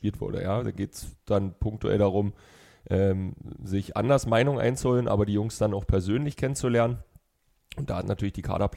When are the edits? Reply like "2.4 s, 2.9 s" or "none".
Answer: none